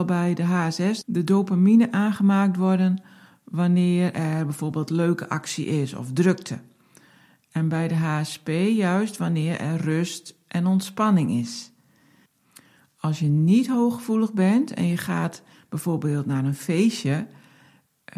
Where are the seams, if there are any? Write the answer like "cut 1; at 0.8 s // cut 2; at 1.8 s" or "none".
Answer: cut 1; at 1.0 s